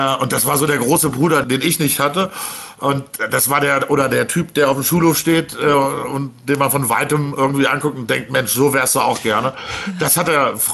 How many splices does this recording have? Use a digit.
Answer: 0